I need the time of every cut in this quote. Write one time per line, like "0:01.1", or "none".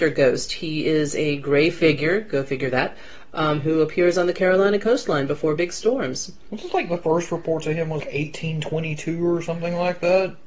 0:08.0